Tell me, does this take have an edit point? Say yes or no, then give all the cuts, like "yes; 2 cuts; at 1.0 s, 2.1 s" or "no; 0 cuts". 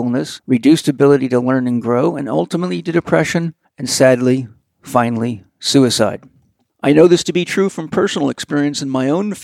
no; 0 cuts